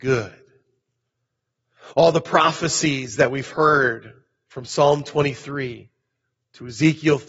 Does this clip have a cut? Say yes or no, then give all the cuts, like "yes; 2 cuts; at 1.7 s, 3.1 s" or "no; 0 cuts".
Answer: no; 0 cuts